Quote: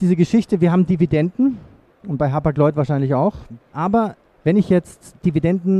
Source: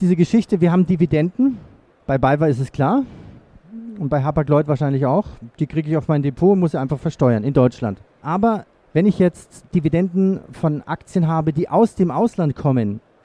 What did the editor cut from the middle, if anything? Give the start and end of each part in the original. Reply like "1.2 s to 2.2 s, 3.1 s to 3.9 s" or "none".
2.0 s to 4.0 s, 5.5 s to 8.1 s